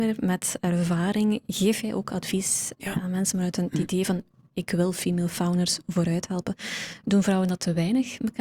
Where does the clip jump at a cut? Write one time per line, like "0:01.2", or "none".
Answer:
none